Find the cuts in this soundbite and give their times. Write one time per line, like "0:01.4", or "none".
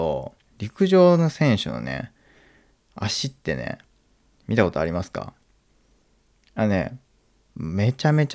none